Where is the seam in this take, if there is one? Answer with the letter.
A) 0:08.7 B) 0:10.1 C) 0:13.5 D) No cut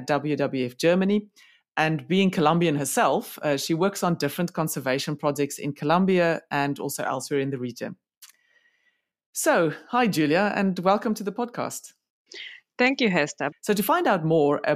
C